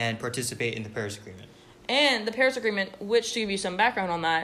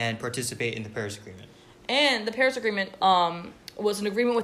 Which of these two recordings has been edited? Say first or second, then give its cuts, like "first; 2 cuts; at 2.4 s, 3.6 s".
second; 1 cut; at 3.0 s